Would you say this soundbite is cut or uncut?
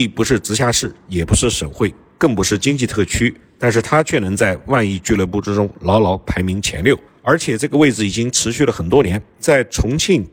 uncut